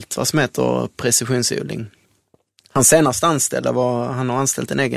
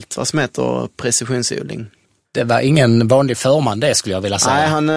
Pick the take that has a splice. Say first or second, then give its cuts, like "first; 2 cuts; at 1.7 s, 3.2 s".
second; 1 cut; at 2.2 s